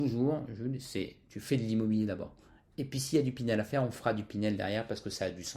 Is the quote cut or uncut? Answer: uncut